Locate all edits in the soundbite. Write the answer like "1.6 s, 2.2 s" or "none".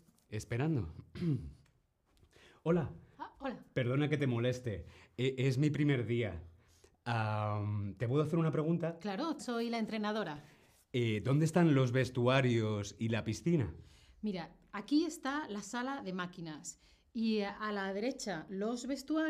9.4 s